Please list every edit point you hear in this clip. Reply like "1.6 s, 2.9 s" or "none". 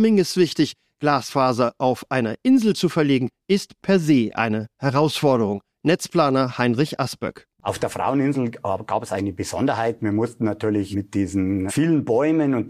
none